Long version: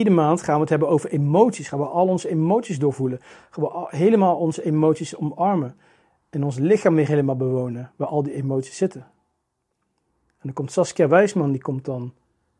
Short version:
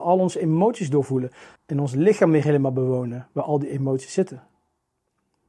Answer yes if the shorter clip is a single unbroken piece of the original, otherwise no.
no